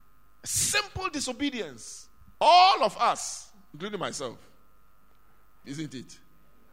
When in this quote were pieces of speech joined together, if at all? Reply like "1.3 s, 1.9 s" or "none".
2.3 s, 5.6 s

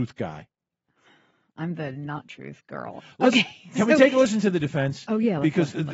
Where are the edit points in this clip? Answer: none

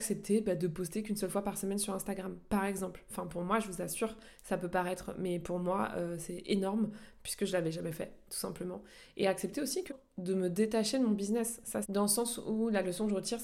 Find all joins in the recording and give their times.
9.9 s, 11.8 s

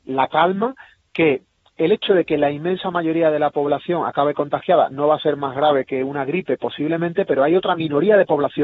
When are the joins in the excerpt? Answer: none

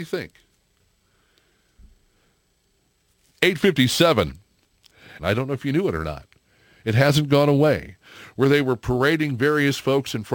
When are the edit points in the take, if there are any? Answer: 5.2 s

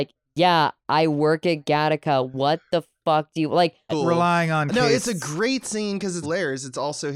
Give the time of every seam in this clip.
3.9 s, 6.2 s

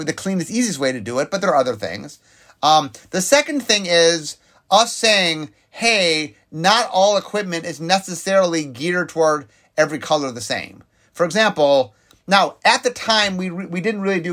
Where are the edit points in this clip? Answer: none

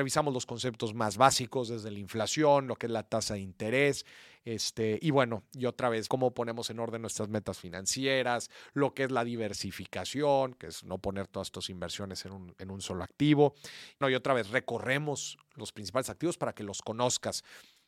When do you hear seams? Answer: 6.1 s, 14.0 s

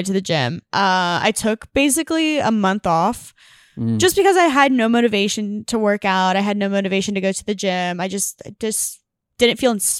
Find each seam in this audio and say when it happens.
none

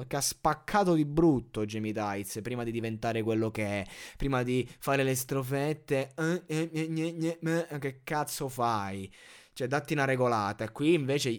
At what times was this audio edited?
none

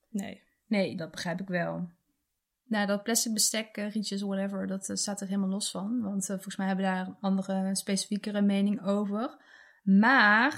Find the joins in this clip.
1.0 s

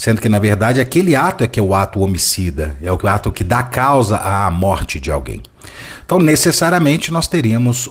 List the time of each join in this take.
none

